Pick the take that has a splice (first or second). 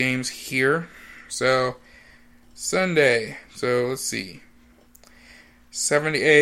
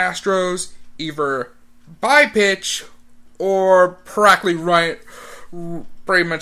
first